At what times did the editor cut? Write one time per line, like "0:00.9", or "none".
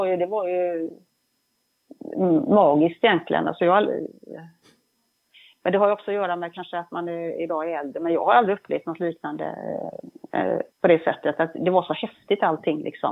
0:10.7